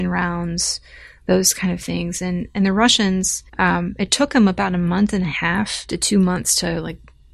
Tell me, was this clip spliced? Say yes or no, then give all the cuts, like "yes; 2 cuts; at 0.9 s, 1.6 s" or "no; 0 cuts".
yes; 1 cut; at 3.5 s